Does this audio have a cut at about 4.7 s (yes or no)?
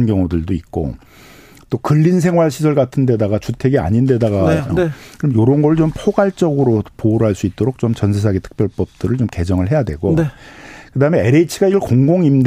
yes